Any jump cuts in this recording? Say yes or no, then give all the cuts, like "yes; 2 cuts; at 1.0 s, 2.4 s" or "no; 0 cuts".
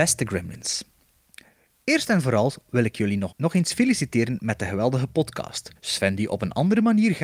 yes; 2 cuts; at 3.3 s, 5.8 s